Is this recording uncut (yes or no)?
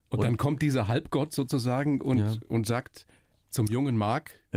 yes